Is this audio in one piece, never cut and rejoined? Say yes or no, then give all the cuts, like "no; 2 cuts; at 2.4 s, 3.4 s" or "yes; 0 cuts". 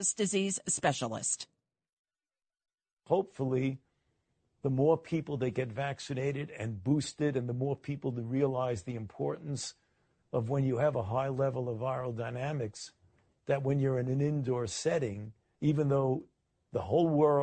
no; 1 cut; at 15.5 s